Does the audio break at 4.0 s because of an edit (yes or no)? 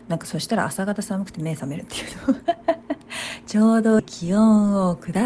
yes